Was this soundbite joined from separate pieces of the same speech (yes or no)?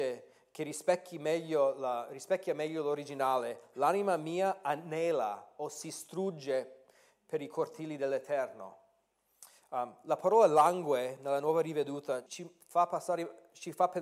yes